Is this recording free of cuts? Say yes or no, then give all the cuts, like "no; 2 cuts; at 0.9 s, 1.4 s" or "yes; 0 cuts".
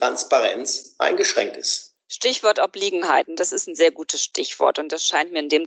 yes; 0 cuts